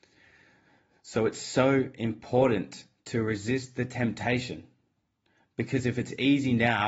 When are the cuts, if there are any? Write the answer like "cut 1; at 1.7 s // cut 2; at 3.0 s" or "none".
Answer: none